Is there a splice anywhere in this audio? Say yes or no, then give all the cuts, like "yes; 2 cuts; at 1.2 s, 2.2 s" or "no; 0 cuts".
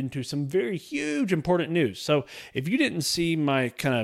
no; 0 cuts